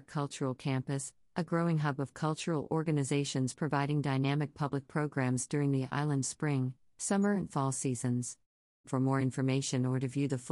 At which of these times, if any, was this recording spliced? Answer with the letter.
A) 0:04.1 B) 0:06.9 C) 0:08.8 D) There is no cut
C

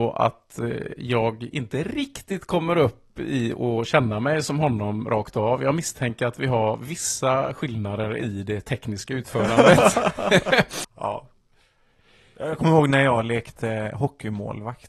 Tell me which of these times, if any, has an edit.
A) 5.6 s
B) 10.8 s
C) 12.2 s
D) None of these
B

